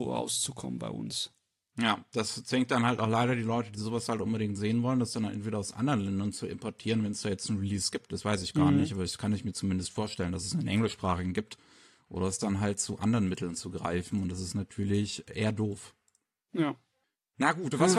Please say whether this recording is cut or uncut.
uncut